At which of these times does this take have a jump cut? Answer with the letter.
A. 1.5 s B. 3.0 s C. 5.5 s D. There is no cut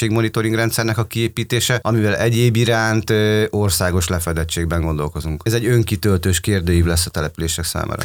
C